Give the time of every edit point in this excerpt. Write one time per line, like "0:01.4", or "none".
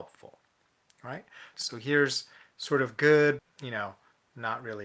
0:01.5
0:03.4